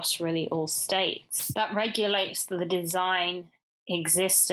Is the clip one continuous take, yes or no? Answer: yes